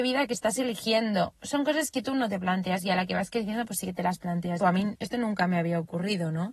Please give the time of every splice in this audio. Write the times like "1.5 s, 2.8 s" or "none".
4.6 s